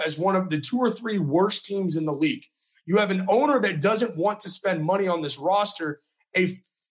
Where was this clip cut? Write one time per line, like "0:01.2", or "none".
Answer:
none

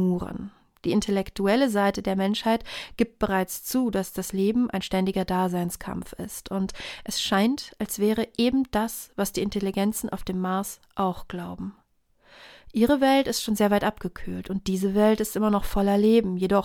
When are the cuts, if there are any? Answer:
none

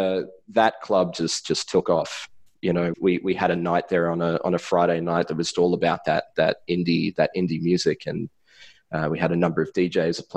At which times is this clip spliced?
0:02.9
0:05.5

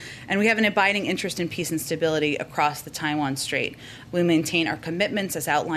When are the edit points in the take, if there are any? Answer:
0:04.1

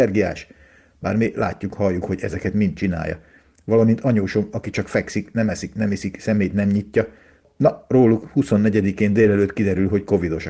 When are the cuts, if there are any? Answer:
none

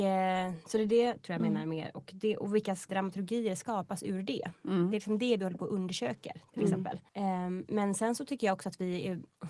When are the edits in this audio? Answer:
0:02.9
0:07.1

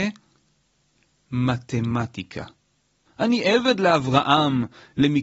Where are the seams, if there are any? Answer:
0:03.1

